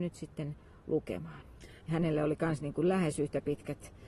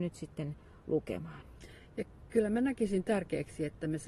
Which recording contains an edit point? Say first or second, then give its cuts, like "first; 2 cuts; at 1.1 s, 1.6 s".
first; 1 cut; at 1.8 s